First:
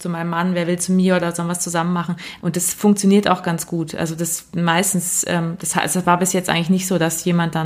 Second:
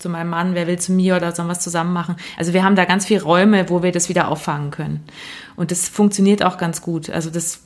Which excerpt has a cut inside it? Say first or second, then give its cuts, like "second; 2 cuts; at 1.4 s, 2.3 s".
first; 1 cut; at 2.4 s